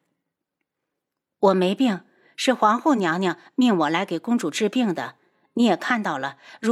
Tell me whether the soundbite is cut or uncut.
uncut